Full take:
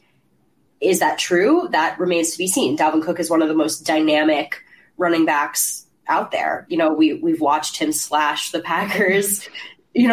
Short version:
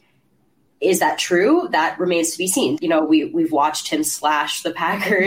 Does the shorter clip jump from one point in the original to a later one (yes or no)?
yes